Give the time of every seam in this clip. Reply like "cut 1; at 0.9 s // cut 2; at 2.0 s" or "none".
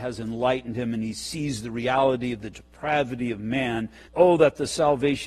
cut 1; at 4.1 s